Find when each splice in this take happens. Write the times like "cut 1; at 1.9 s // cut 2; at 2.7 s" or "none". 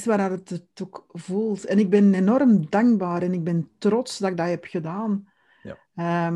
none